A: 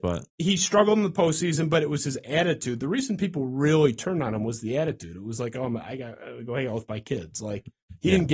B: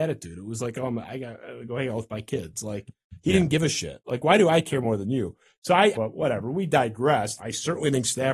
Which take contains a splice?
B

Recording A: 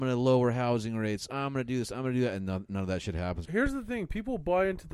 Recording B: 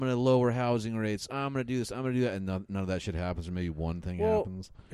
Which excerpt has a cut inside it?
A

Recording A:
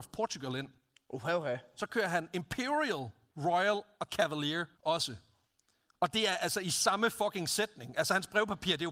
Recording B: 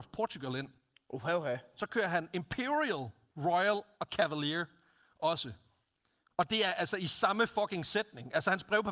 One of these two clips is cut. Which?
A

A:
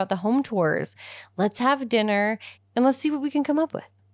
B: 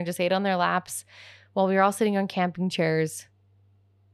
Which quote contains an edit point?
A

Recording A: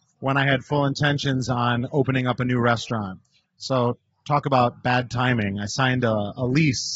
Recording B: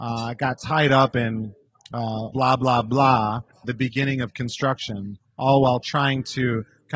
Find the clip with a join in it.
B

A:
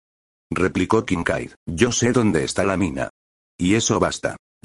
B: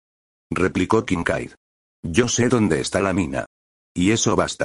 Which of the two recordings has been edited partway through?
A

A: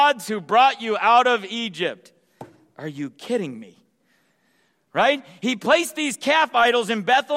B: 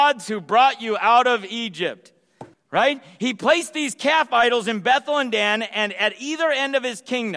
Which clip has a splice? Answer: B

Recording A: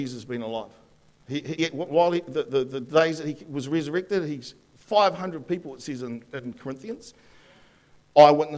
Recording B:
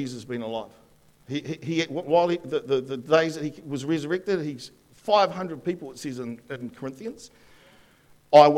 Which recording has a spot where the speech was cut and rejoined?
A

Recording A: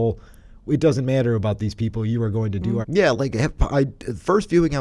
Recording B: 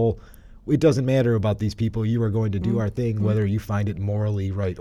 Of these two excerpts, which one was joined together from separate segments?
A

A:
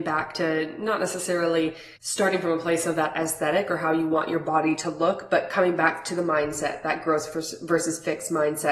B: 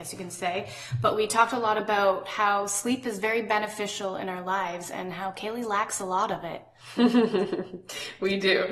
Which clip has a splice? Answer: A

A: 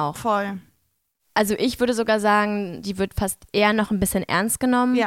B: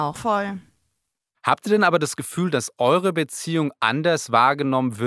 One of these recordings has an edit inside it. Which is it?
A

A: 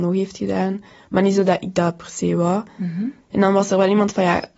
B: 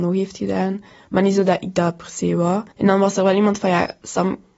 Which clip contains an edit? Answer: B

